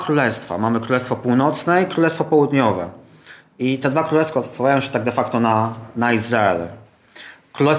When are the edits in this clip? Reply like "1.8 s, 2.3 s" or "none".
none

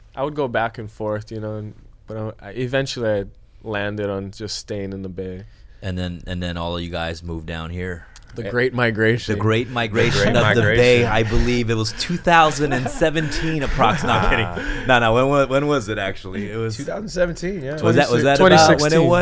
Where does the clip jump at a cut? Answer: none

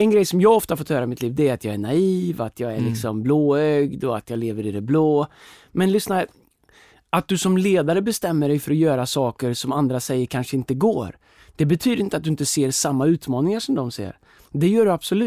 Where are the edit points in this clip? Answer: none

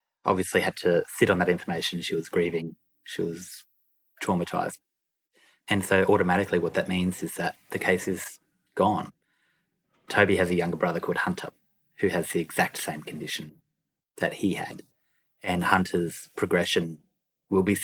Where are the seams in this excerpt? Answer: none

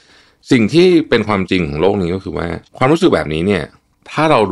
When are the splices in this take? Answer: 2.7 s

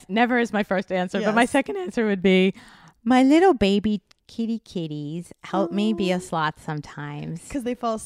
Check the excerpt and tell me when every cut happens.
none

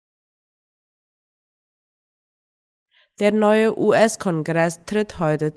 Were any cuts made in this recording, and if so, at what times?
none

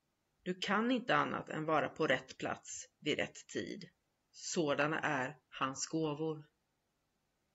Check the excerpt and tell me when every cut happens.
4.2 s

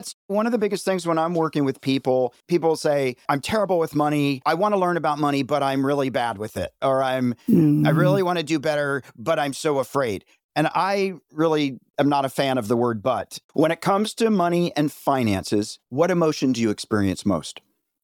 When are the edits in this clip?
13.5 s, 15.8 s

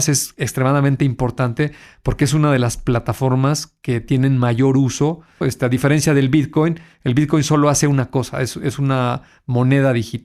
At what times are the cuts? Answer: 5.4 s

